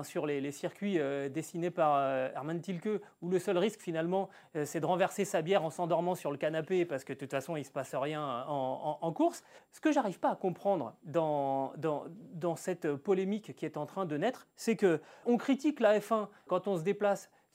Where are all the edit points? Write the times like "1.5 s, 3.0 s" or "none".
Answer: 9.6 s, 15.2 s, 16.5 s